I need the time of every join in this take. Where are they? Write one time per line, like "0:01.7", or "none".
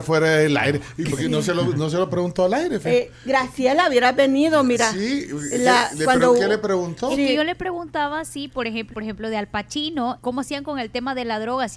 0:08.9
0:10.2